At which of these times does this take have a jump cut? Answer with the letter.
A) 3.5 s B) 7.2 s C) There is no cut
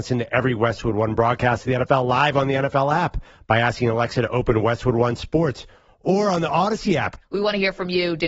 B